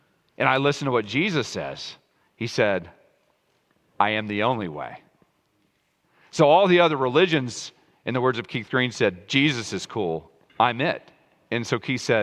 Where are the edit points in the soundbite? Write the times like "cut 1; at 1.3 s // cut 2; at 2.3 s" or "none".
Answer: cut 1; at 10.5 s